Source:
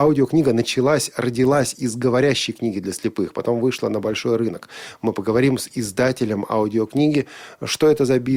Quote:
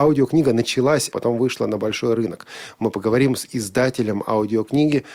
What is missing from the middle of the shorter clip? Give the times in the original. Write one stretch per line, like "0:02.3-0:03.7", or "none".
0:01.1-0:03.3